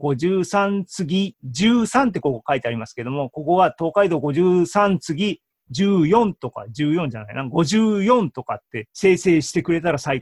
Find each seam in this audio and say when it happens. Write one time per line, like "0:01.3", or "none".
none